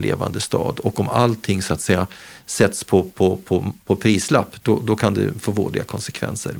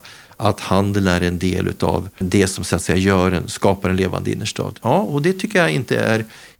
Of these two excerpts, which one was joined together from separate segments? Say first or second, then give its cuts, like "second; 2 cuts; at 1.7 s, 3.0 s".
second; 2 cuts; at 2.2 s, 4.8 s